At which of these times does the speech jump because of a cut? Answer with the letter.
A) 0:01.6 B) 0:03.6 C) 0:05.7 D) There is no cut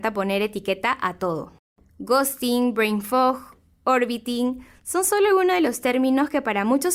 D